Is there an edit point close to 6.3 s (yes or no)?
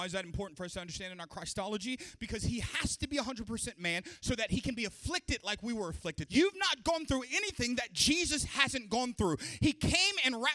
yes